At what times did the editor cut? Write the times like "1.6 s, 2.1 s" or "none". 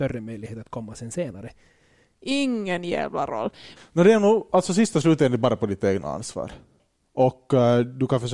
2.1 s, 3.8 s